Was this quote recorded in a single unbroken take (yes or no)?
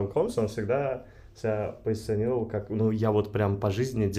yes